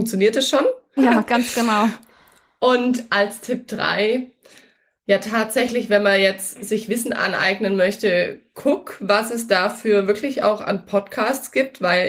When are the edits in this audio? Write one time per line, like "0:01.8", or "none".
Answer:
0:01.0